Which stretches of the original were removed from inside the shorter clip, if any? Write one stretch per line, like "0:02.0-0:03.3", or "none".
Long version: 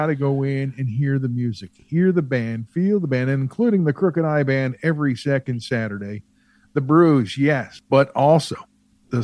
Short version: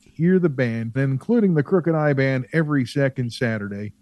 0:02.7-0:03.3